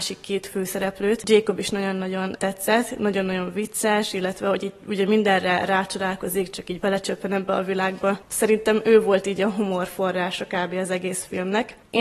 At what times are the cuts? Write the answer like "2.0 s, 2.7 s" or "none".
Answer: 2.4 s